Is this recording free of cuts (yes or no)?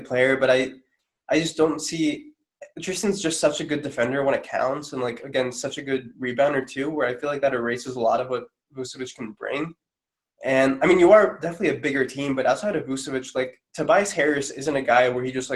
yes